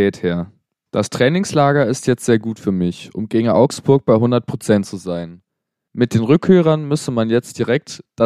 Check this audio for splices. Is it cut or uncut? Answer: uncut